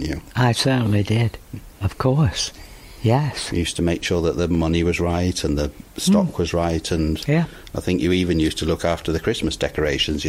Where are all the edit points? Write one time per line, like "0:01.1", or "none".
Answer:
none